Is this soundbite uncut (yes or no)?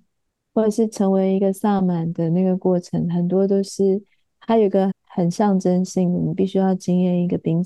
no